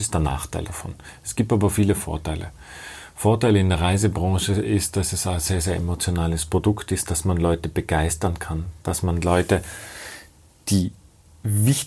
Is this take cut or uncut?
uncut